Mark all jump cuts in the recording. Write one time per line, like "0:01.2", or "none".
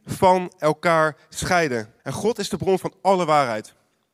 0:02.0